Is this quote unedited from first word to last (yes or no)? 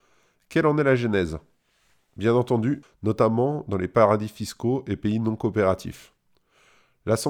no